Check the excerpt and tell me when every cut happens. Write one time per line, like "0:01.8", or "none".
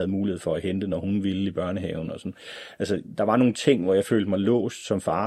none